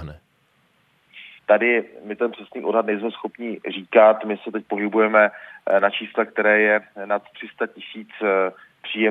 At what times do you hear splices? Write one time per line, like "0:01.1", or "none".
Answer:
0:01.4